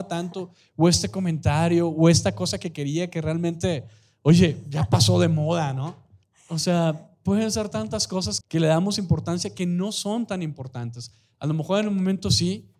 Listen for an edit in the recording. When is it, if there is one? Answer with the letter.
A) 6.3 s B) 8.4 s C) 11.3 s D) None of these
B